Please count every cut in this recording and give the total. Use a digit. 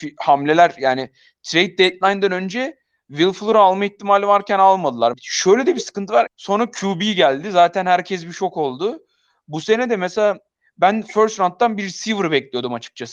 2